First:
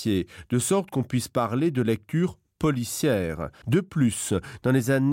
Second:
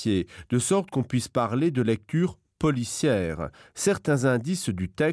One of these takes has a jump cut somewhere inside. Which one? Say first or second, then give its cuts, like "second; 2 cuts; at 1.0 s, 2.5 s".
first; 1 cut; at 3.6 s